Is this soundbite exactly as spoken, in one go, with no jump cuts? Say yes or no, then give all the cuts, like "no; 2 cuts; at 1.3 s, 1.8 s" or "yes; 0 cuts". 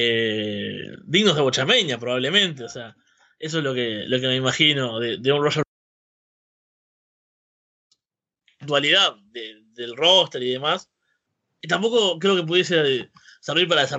yes; 0 cuts